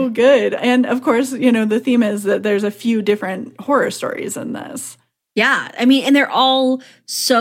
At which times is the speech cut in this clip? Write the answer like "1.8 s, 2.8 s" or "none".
none